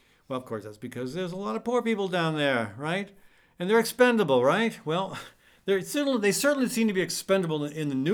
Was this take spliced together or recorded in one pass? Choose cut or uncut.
uncut